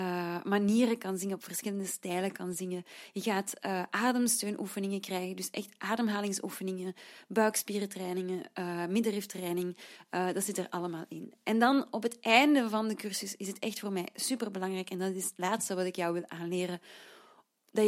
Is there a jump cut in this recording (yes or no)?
no